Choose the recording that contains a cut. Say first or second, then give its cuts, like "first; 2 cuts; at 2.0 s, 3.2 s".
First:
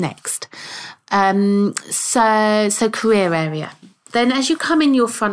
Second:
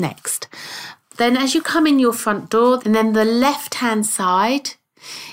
second; 2 cuts; at 1.0 s, 2.8 s